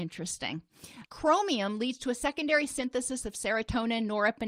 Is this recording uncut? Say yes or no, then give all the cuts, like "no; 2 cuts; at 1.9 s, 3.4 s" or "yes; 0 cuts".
no; 1 cut; at 1.0 s